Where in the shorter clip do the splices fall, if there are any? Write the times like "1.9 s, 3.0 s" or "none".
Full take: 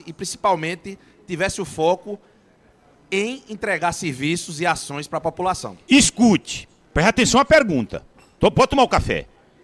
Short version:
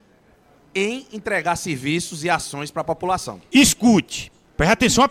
none